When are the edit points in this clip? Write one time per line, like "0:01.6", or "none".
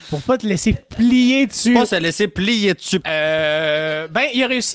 0:03.0